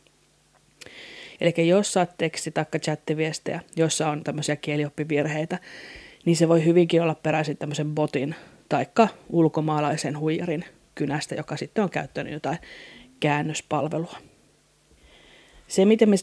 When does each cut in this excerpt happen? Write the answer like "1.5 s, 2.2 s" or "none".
1.4 s